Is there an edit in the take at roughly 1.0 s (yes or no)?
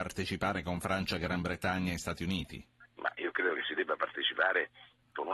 no